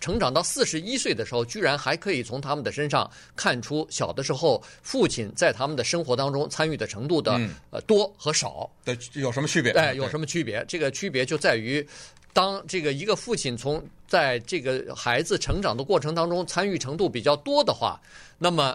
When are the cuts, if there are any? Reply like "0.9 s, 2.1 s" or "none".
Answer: none